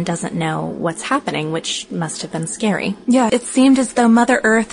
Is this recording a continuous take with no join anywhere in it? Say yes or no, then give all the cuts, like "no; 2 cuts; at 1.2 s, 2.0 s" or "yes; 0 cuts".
no; 1 cut; at 3.3 s